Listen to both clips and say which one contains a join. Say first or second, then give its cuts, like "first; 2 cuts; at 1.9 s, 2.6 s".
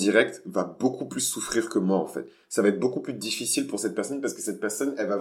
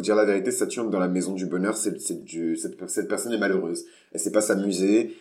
second; 1 cut; at 2.2 s